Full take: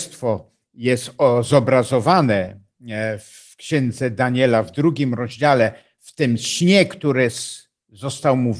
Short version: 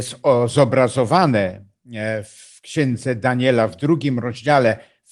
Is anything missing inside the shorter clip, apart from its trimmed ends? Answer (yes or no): no